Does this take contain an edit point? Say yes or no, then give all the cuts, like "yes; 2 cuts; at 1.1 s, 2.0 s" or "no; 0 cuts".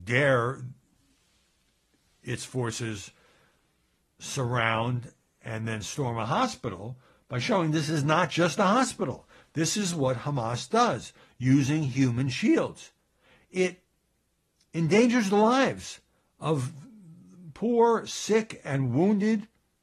no; 0 cuts